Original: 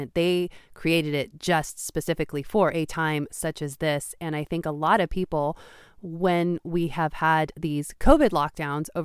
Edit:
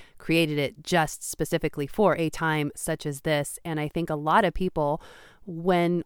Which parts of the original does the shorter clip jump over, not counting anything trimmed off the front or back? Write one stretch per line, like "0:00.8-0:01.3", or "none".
none